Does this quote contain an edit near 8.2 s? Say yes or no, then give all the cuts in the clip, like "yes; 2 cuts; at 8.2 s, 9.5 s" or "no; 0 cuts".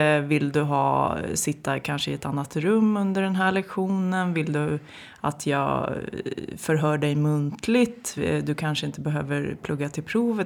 no; 0 cuts